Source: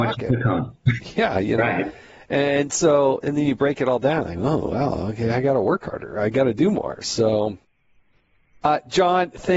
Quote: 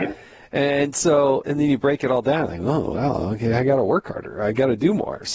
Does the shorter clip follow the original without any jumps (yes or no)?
yes